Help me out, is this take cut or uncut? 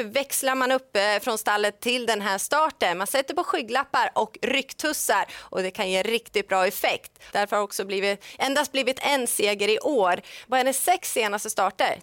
cut